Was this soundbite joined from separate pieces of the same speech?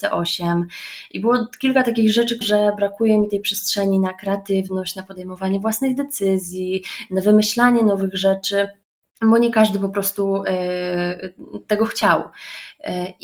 yes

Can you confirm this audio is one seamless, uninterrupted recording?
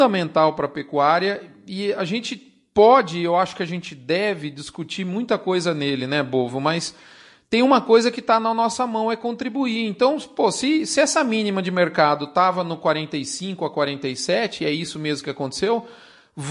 yes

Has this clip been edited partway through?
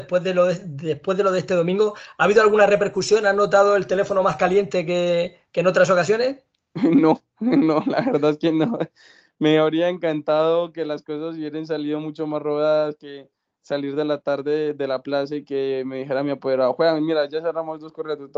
no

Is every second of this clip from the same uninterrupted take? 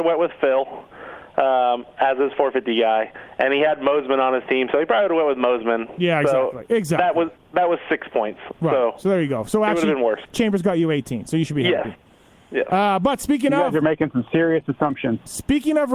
yes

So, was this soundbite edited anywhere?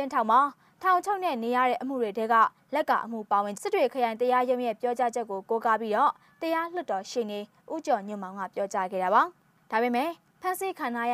yes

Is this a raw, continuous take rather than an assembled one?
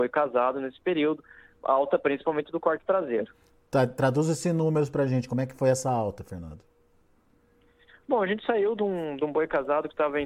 yes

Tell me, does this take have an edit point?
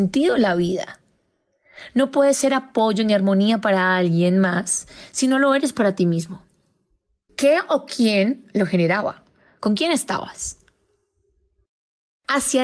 yes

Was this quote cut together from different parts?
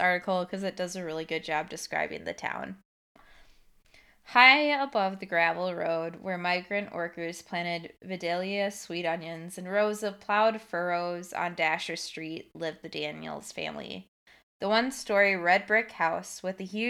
no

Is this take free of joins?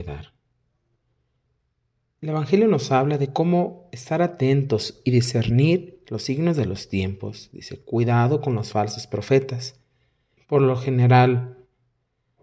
no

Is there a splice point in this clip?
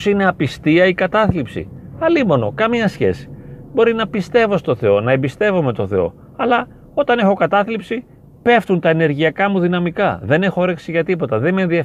no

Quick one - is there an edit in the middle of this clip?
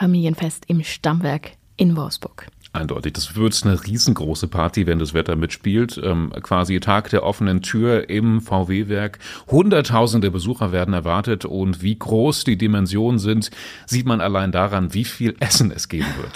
no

